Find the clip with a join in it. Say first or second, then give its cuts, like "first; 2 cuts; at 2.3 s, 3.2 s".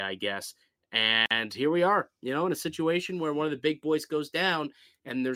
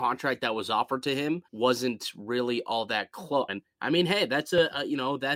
second; 2 cuts; at 1.5 s, 3.5 s